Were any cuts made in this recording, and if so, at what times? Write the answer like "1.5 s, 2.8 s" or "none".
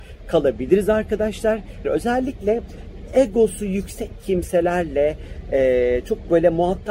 1.8 s